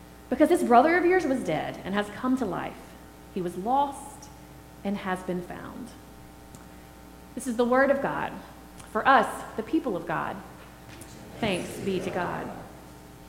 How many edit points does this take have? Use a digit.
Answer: 0